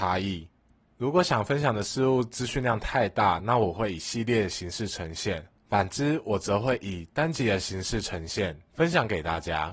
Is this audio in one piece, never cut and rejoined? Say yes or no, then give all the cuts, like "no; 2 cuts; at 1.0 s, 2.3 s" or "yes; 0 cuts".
yes; 0 cuts